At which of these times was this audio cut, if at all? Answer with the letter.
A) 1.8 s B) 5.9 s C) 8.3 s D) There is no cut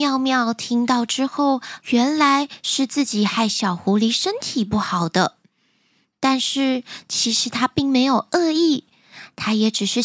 A